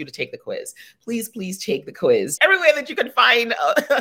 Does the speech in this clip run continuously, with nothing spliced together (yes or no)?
no